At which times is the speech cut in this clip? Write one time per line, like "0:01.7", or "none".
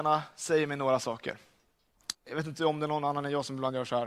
0:02.1